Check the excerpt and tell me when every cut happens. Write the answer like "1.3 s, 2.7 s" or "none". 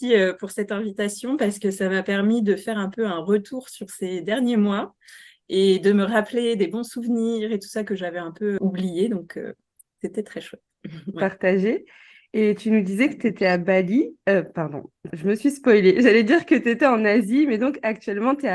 8.6 s, 11.1 s, 15.1 s